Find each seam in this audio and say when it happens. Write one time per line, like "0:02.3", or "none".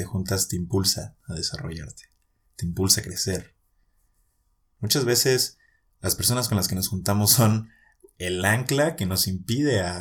none